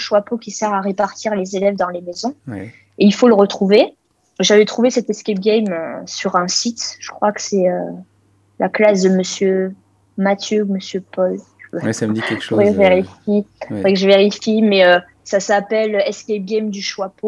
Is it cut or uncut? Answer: cut